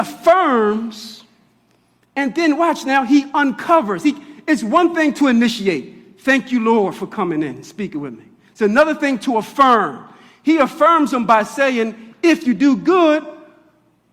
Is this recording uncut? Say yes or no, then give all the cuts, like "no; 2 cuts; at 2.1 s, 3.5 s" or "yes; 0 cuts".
yes; 0 cuts